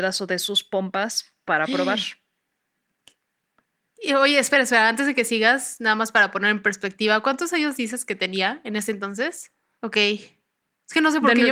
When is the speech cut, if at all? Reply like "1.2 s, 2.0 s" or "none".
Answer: 9.8 s